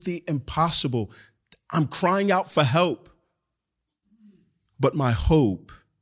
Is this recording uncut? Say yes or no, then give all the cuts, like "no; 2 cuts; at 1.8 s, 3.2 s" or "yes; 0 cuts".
yes; 0 cuts